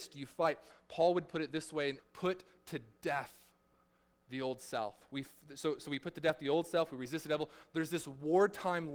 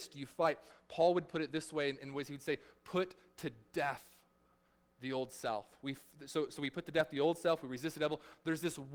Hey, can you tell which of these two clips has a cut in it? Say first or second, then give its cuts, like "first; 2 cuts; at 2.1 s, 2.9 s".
first; 1 cut; at 2.0 s